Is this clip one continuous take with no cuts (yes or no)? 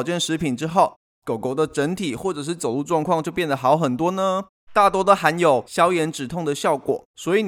no